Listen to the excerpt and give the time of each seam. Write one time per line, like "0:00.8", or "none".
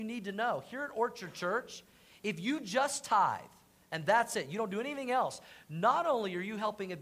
none